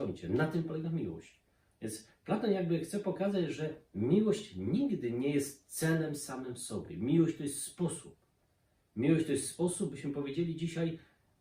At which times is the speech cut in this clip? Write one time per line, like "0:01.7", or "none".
none